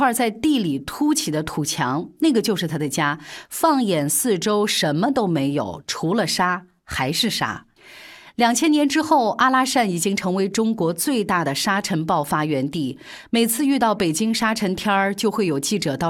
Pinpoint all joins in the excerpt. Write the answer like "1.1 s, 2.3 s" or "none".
none